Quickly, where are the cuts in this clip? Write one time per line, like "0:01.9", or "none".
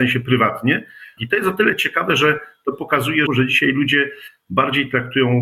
0:01.2
0:03.3